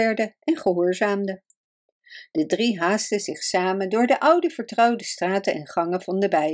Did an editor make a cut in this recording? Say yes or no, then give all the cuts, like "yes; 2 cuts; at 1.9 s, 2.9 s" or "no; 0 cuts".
no; 0 cuts